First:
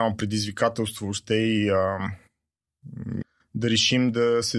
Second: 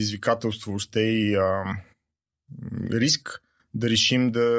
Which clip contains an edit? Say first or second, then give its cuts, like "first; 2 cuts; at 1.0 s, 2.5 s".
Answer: first; 1 cut; at 3.2 s